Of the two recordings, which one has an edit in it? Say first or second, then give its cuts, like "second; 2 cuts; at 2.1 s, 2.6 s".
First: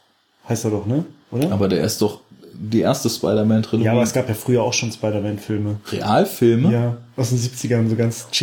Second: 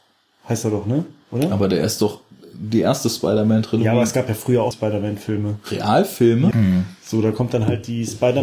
second; 2 cuts; at 4.7 s, 6.5 s